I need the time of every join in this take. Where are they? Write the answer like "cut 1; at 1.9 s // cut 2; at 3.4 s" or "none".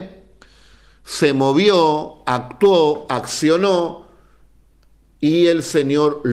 none